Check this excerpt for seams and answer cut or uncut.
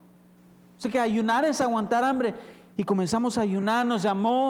cut